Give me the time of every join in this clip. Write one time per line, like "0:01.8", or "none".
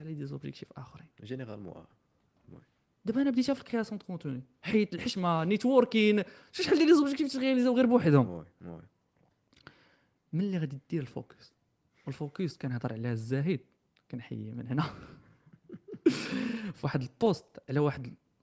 none